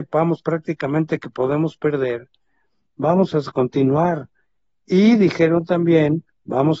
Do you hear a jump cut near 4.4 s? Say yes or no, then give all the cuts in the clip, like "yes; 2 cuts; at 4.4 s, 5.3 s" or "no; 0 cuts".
no; 0 cuts